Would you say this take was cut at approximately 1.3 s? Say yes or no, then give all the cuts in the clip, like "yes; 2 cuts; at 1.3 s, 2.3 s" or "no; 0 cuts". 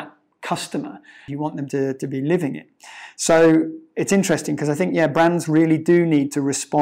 yes; 1 cut; at 1.3 s